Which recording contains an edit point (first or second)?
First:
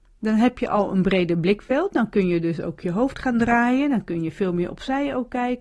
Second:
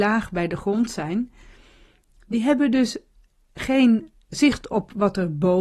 second